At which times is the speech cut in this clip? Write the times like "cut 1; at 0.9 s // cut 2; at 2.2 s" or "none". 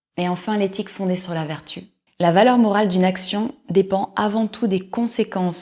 cut 1; at 2.1 s